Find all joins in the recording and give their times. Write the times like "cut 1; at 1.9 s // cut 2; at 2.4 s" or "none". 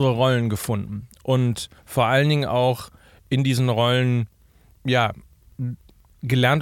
cut 1; at 1.8 s // cut 2; at 4.7 s